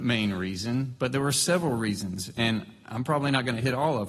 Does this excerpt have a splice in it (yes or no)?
no